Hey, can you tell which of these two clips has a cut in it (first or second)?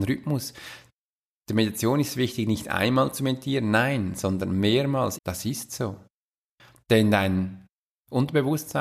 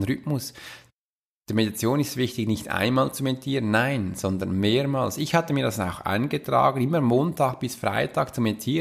first